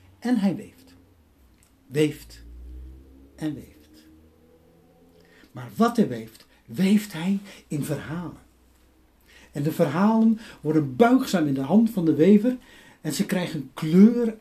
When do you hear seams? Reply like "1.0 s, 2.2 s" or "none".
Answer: none